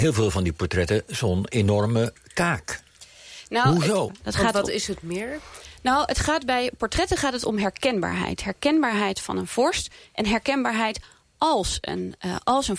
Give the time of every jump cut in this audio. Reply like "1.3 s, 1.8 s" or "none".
4.1 s